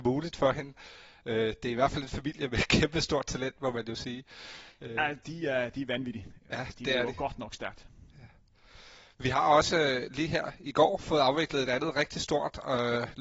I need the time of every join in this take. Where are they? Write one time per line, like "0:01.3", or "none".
none